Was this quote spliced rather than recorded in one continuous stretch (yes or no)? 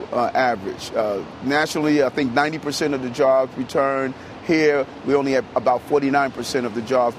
no